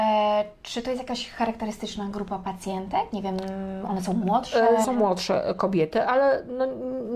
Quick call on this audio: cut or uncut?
cut